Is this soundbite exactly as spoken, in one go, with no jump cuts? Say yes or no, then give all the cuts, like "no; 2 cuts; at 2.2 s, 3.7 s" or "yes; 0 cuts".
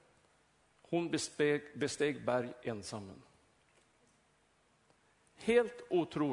yes; 0 cuts